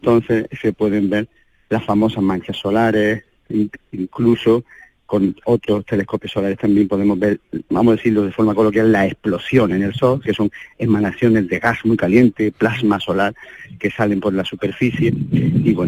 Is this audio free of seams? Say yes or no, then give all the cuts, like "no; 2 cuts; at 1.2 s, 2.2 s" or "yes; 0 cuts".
no; 1 cut; at 10.2 s